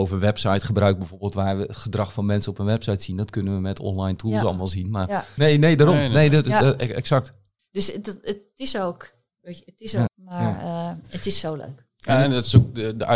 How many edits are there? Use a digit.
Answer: 3